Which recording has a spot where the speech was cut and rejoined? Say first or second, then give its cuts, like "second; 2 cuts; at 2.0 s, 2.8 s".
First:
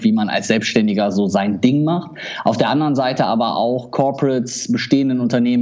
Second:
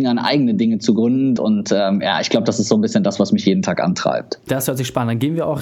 second; 2 cuts; at 1.4 s, 4.5 s